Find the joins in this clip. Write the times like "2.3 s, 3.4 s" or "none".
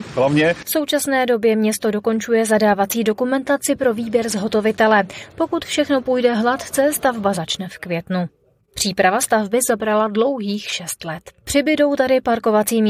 11.4 s